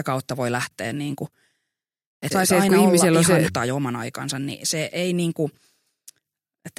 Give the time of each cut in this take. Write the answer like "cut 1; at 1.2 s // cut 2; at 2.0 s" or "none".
cut 1; at 2.3 s // cut 2; at 3.5 s